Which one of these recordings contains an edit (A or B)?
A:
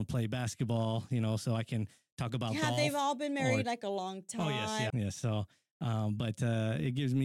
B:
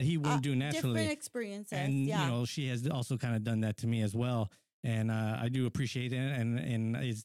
A